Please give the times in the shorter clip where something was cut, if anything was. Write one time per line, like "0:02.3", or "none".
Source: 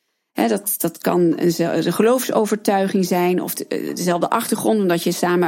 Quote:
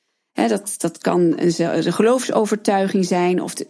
none